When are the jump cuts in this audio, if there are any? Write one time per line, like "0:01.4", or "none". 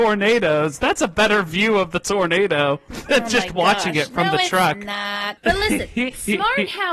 0:05.4